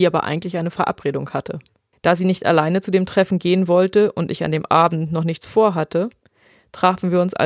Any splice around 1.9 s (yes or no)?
yes